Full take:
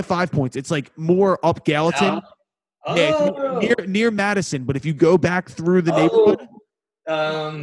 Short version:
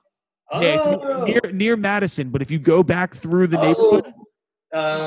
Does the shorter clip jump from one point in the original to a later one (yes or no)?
no